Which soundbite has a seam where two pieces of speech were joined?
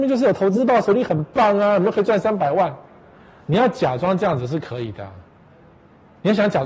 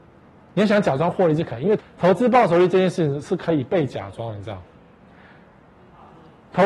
second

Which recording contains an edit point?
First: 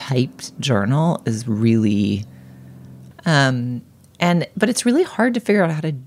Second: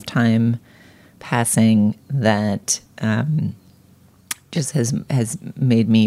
first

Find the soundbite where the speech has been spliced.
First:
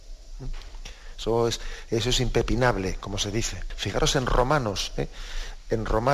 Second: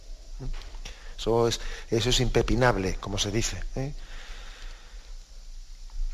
first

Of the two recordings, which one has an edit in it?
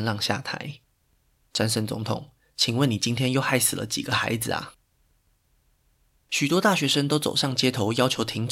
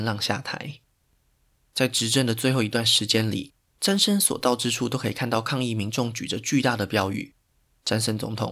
first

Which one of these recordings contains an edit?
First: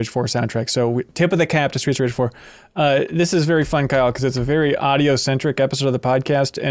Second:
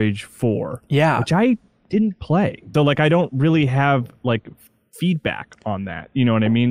second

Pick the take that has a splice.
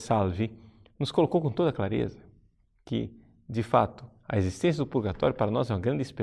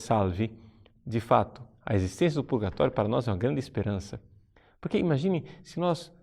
second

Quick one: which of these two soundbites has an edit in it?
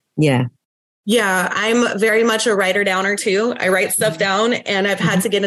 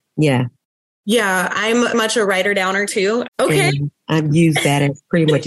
second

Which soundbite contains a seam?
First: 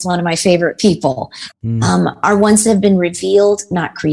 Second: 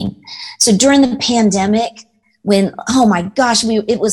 first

